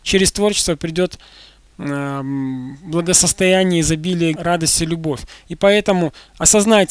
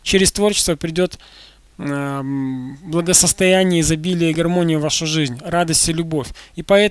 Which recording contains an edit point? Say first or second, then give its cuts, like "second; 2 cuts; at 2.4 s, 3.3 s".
first; 1 cut; at 4.3 s